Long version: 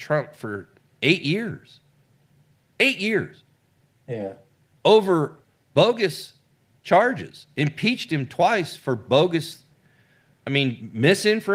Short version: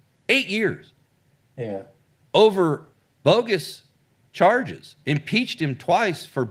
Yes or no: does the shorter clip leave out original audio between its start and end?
no